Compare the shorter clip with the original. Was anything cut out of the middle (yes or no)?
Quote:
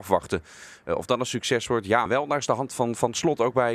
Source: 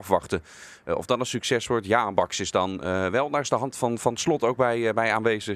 yes